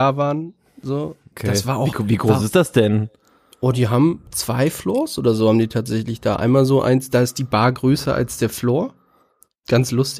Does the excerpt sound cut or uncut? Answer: cut